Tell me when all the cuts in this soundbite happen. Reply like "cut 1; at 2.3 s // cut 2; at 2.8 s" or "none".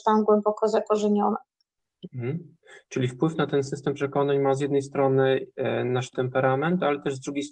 none